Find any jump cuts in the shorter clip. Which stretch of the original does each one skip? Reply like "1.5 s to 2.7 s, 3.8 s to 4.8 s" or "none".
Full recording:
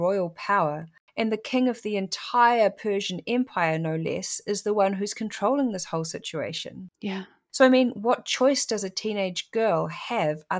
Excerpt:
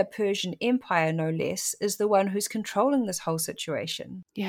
none